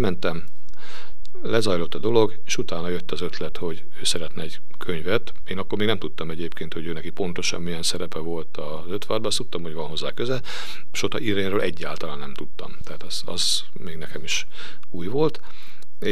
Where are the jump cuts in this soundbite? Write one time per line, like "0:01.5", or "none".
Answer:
none